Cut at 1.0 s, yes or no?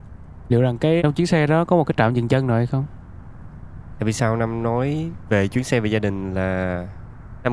yes